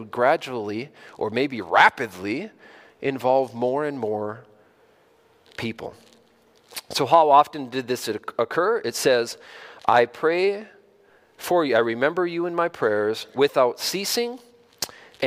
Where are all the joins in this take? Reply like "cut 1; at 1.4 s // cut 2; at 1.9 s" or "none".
none